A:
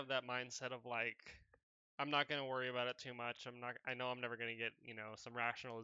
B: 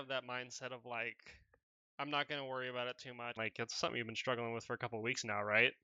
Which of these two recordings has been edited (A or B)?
B